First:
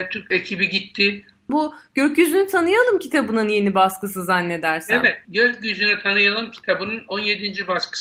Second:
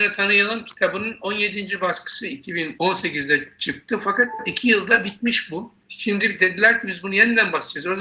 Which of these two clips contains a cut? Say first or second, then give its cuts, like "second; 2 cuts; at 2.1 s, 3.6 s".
first; 1 cut; at 1.5 s